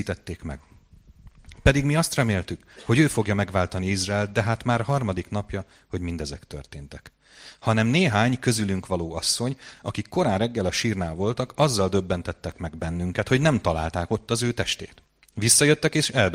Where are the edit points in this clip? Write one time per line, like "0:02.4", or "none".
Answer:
none